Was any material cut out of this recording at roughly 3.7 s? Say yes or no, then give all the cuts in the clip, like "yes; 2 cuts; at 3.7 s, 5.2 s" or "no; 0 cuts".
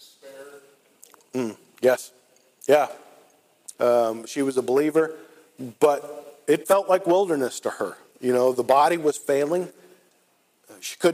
yes; 1 cut; at 3.7 s